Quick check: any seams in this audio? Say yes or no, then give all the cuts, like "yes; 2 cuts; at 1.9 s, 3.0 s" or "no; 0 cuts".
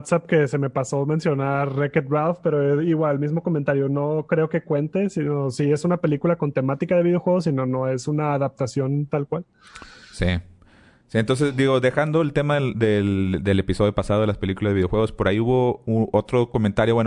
no; 0 cuts